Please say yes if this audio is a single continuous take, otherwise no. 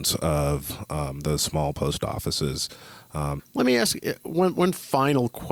no